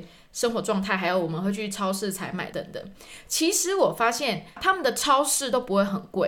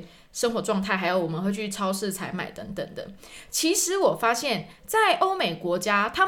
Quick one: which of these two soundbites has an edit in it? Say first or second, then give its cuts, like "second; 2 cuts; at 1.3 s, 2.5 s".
first; 2 cuts; at 2.5 s, 4.6 s